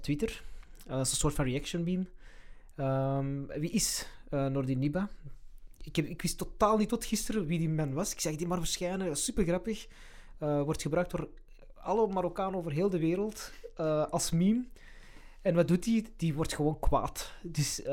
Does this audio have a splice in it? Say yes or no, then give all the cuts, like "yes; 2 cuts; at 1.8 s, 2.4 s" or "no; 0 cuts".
no; 0 cuts